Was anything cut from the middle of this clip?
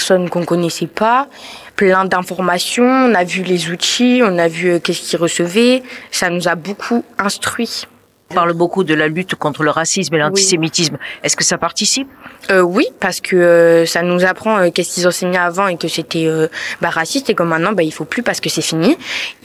no; 0 cuts

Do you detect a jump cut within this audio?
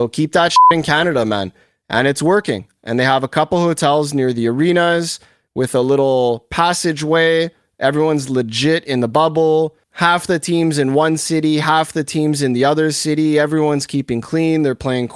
no; 0 cuts

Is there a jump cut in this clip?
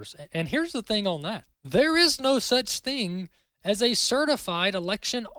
yes; 1 cut; at 1.5 s

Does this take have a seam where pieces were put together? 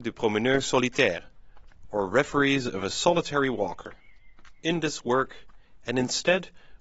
yes; 1 cut; at 5.8 s

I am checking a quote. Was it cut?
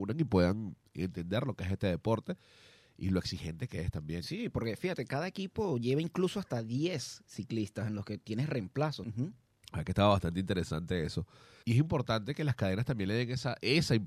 yes; 2 cuts; at 9.0 s, 11.6 s

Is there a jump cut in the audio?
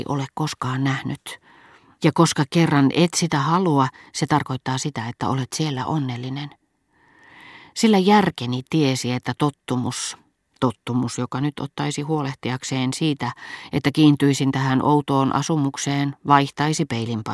yes; 1 cut; at 2.0 s

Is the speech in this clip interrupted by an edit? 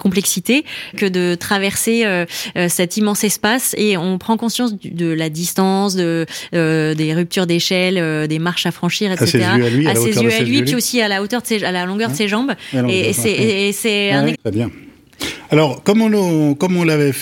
yes; 2 cuts; at 0.9 s, 14.3 s

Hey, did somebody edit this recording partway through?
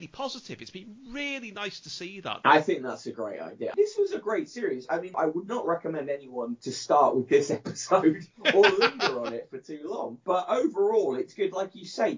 no; 0 cuts

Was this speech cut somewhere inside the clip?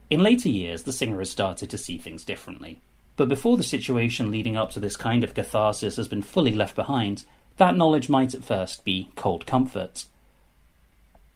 yes; 1 cut; at 3.0 s

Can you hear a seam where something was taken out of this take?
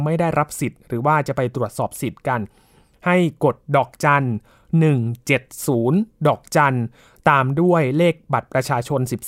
no; 0 cuts

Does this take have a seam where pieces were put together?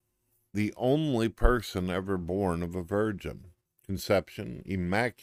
yes; 1 cut; at 3.7 s

